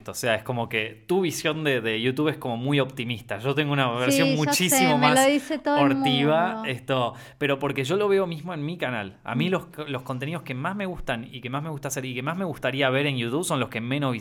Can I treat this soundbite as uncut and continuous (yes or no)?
yes